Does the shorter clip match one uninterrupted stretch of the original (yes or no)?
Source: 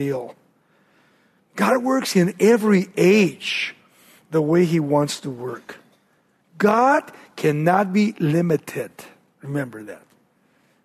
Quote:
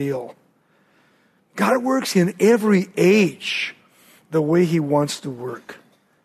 yes